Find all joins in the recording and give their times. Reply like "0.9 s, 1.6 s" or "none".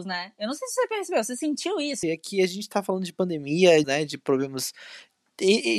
2.0 s, 3.8 s